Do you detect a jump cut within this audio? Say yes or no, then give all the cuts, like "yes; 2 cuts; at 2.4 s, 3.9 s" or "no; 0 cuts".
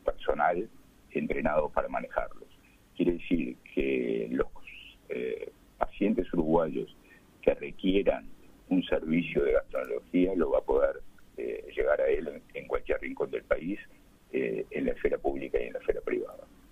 no; 0 cuts